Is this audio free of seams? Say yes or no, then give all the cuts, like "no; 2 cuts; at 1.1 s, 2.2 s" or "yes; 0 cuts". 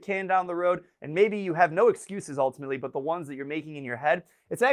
yes; 0 cuts